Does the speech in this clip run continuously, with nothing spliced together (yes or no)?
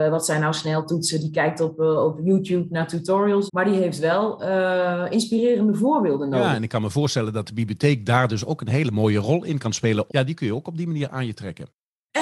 no